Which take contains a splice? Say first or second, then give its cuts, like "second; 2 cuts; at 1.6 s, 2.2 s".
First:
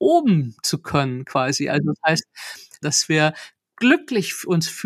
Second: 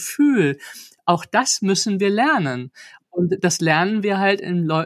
first; 1 cut; at 2.8 s